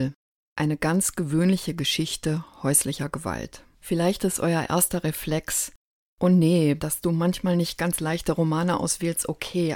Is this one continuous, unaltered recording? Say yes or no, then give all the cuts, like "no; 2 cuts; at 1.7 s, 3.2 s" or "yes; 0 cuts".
no; 1 cut; at 6.8 s